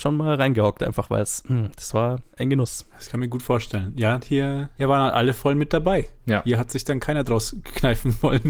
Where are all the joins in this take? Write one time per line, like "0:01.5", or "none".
none